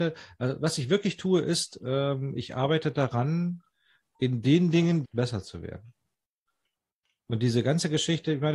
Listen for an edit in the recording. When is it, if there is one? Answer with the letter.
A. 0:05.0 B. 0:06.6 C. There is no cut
A